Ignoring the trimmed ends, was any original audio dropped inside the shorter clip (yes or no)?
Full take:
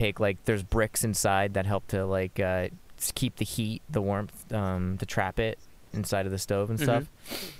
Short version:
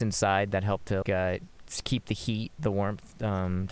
yes